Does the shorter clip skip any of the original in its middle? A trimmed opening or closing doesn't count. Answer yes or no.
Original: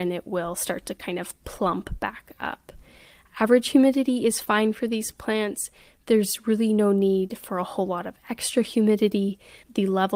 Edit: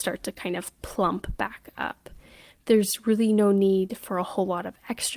yes